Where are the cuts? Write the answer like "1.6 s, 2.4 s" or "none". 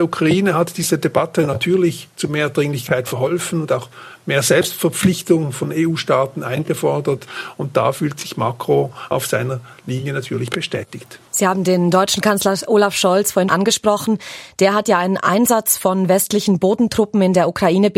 11.3 s, 13.5 s